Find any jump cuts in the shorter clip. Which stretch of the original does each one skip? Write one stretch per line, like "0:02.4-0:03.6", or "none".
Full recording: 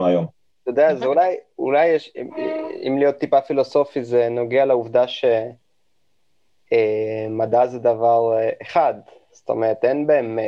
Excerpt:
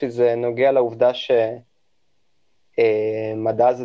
none